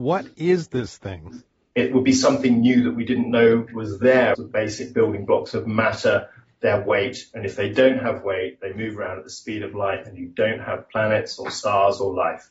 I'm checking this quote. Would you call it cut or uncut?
cut